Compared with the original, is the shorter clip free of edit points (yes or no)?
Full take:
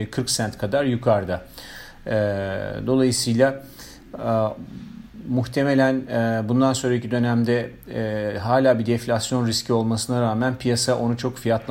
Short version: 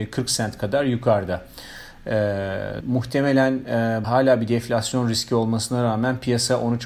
no